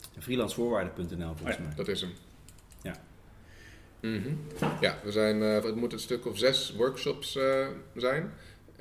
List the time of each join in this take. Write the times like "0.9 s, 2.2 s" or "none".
4.0 s, 5.6 s